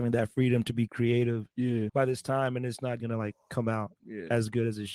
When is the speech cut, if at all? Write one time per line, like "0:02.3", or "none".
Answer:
0:01.9
0:03.0